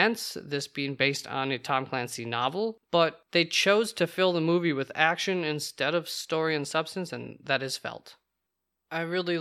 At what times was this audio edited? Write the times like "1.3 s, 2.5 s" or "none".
none

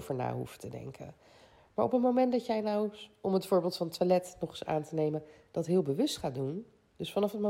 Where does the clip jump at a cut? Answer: none

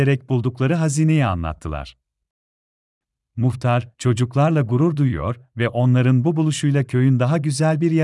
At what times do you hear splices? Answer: none

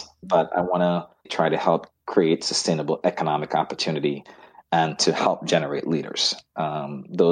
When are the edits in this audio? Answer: 1.2 s

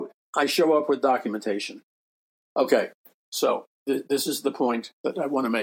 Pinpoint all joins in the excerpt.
3.8 s

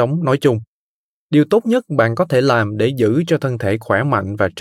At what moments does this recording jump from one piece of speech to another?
none

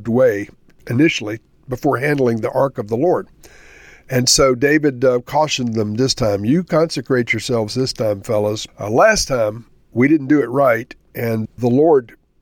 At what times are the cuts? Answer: 8.7 s

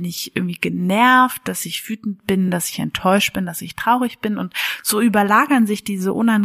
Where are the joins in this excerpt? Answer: none

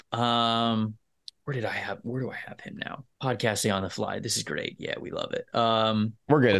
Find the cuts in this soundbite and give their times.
3.1 s

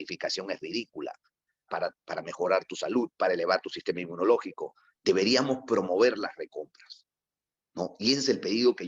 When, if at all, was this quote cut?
1.7 s, 4.9 s

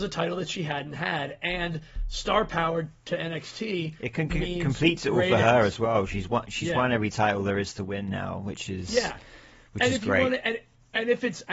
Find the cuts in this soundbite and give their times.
none

